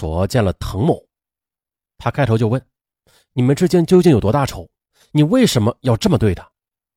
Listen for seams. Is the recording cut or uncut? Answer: uncut